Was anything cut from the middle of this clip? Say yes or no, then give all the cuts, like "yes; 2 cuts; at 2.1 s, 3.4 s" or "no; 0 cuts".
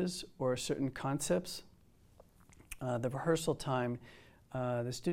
no; 0 cuts